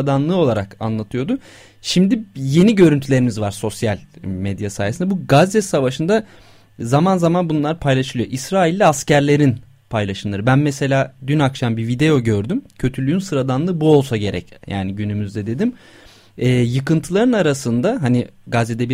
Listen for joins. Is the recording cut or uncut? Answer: uncut